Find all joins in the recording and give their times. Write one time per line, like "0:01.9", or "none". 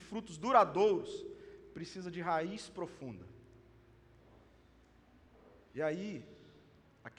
none